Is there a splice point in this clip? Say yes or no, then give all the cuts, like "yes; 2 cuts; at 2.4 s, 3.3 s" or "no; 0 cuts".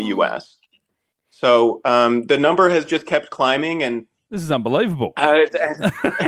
yes; 2 cuts; at 1.1 s, 4.3 s